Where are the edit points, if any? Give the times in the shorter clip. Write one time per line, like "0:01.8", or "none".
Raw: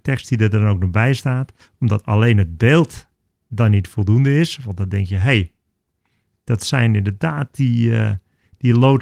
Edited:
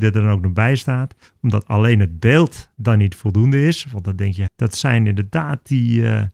0:02.7
0:04.5